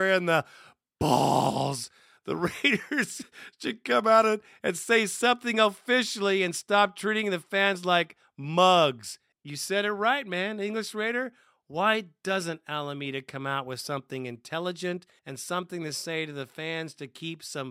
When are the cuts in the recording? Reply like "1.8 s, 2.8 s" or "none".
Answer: 9.3 s, 15.2 s